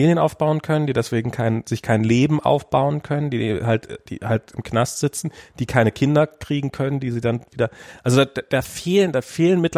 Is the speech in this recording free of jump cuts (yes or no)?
yes